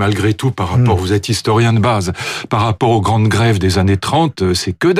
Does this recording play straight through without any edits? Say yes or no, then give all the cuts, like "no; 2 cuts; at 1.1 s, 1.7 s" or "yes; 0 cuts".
yes; 0 cuts